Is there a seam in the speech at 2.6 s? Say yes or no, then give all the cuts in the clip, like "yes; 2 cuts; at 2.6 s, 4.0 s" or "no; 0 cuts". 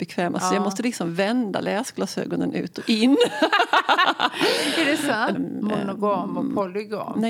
no; 1 cut; at 5.3 s